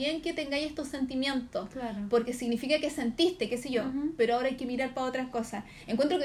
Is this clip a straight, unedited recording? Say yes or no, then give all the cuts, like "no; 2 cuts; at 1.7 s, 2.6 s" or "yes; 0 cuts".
no; 1 cut; at 3.5 s